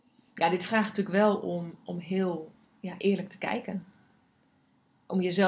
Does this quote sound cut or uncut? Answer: uncut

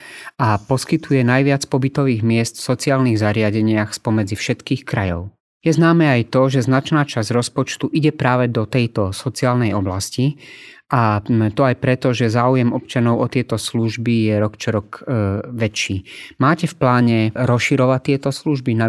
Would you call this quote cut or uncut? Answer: uncut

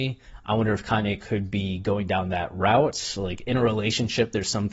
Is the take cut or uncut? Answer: uncut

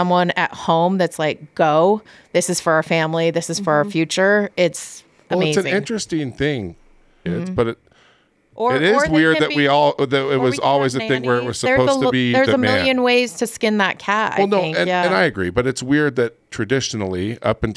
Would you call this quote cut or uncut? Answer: cut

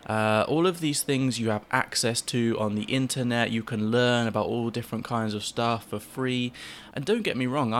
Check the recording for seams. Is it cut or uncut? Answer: cut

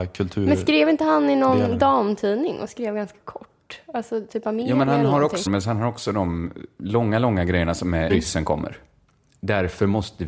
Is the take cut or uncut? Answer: cut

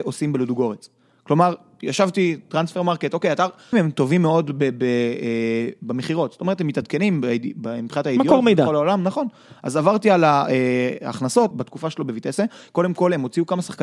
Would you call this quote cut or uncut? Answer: cut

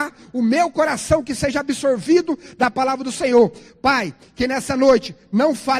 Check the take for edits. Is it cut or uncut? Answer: uncut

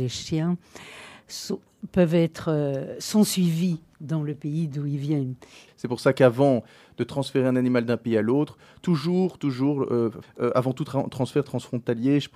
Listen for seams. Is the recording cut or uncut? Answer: cut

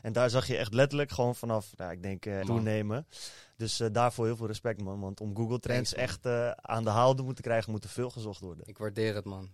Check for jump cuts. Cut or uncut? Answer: cut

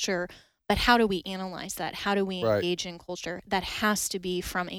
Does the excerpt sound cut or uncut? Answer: uncut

